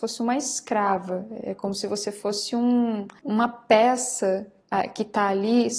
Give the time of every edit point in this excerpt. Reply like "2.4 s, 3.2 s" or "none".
none

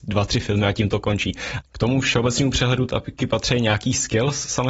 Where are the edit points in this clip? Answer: 1.6 s

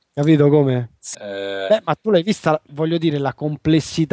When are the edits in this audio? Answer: 1.1 s, 2.7 s

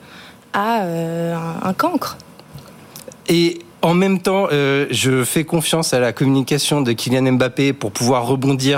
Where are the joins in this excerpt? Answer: 3.7 s

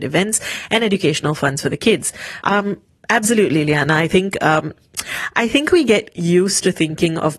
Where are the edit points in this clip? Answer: 2.4 s

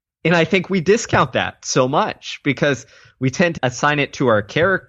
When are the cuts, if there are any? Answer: 3.6 s

